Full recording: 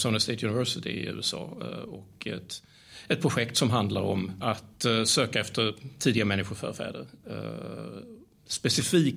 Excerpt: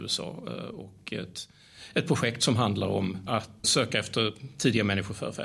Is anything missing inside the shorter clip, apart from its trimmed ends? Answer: yes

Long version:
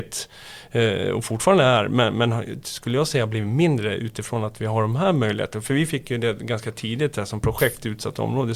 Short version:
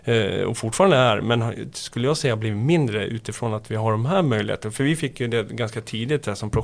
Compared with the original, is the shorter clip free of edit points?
no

